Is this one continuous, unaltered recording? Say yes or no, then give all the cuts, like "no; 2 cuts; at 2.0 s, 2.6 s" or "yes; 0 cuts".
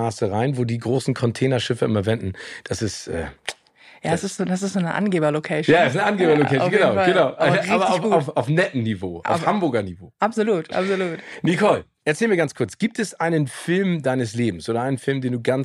yes; 0 cuts